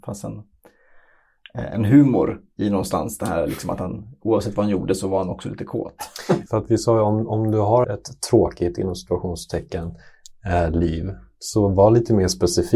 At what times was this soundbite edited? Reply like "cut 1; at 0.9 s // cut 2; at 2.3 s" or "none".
cut 1; at 6.5 s // cut 2; at 7.8 s